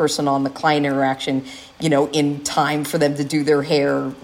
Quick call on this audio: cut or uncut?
cut